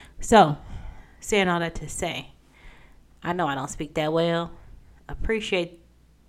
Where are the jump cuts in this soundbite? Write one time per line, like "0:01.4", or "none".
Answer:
none

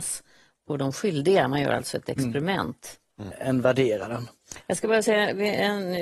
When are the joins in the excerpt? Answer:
0:03.3

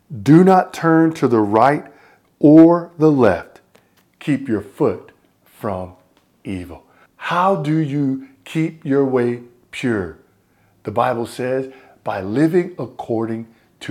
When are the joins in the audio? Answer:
0:07.1

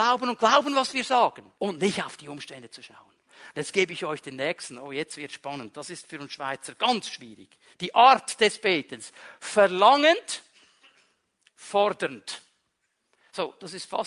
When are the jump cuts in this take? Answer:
0:01.5
0:07.7

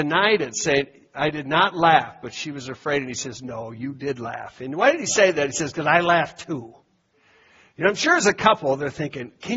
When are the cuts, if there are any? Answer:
none

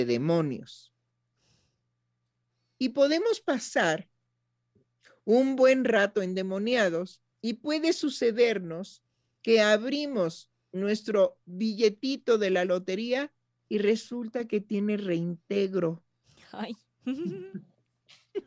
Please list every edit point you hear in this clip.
0:07.3
0:11.4

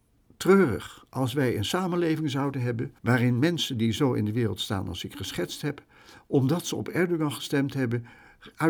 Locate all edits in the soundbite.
0:03.0

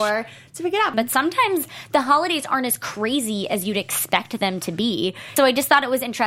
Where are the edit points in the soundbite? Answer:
0:00.9
0:05.4

